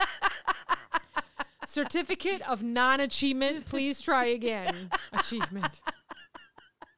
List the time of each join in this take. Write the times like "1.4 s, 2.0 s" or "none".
none